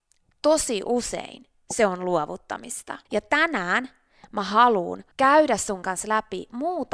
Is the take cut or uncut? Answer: cut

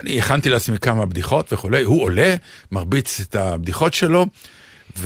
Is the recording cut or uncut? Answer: uncut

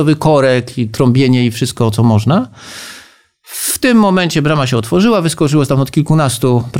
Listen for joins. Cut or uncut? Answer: cut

